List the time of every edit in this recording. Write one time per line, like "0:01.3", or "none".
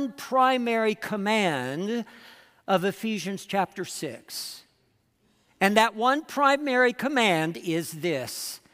none